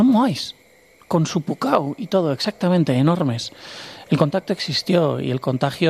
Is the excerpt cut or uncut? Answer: uncut